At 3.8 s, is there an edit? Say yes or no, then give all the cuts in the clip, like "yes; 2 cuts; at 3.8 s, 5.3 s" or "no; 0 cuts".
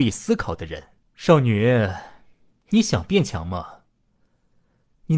no; 1 cut; at 1.0 s